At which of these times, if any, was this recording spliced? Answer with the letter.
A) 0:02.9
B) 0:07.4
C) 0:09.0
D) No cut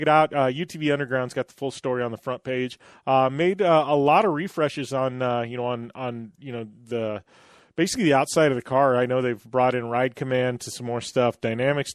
D